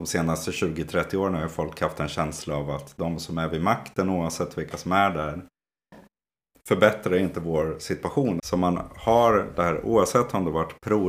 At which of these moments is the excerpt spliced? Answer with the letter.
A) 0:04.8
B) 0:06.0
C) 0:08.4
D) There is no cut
C